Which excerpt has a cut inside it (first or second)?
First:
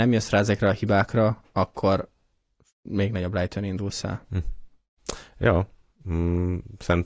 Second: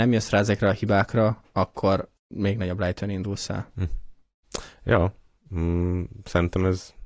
second